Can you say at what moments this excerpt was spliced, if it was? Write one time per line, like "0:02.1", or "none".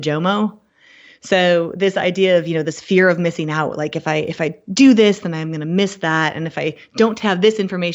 none